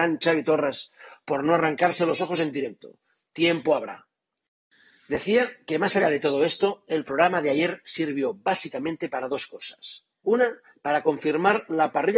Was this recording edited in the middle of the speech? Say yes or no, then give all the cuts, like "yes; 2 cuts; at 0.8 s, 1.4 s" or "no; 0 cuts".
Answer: no; 0 cuts